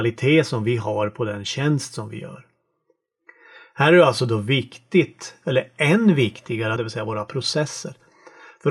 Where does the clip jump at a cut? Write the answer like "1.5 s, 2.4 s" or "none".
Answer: 6.8 s